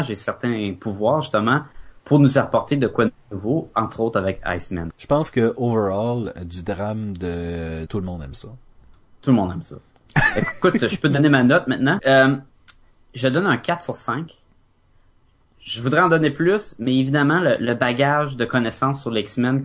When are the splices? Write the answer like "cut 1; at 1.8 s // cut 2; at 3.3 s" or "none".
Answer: cut 1; at 4.9 s // cut 2; at 7.9 s // cut 3; at 12.0 s